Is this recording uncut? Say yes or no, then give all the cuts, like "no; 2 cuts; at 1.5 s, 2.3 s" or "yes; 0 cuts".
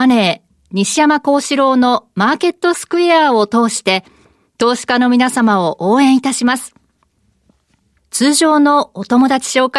no; 1 cut; at 8.0 s